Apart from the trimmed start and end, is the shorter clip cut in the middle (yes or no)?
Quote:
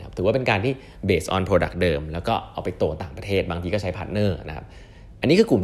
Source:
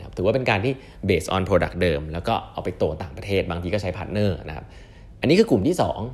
no